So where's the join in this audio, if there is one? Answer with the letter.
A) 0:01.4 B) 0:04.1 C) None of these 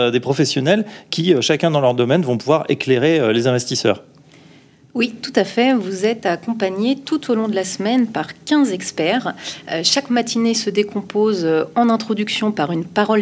C